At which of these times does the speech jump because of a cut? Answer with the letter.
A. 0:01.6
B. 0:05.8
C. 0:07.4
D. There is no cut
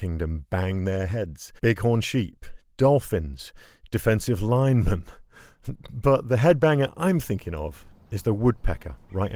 A